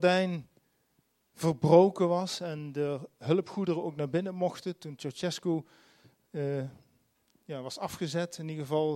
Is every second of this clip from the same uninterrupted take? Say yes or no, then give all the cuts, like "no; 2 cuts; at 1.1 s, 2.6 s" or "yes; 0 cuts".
yes; 0 cuts